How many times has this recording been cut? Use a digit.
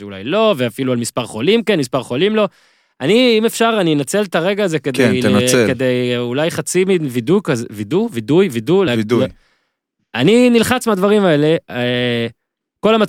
0